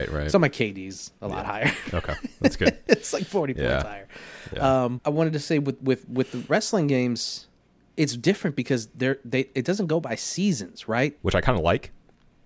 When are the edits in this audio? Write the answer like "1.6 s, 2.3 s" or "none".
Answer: 5.0 s, 11.2 s